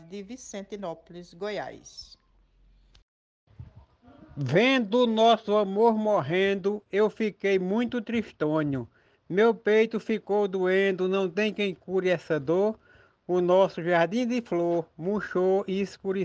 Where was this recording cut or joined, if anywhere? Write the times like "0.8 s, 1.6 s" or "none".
9.1 s